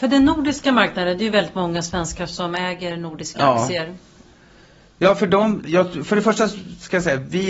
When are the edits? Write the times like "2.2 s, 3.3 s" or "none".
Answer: 5.6 s